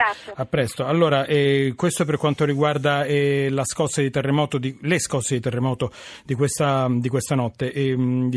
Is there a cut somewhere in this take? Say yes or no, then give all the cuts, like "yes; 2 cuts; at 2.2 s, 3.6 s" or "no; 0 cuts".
no; 0 cuts